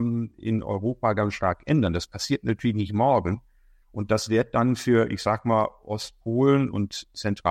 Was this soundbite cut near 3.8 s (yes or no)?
yes